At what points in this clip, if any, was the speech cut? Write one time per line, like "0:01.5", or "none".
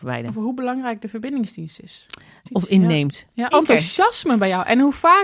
0:02.5
0:03.5